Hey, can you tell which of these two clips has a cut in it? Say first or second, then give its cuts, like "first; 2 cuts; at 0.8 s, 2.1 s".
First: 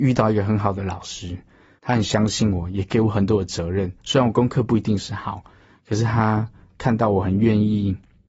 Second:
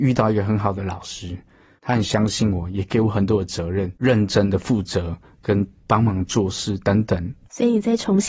second; 1 cut; at 4.0 s